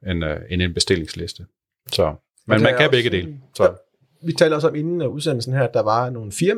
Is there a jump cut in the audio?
no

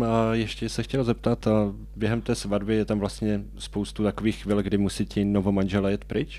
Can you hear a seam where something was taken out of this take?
no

